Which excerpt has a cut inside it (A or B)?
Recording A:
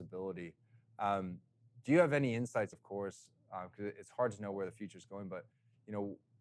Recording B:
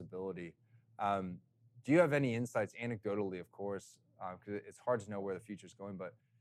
A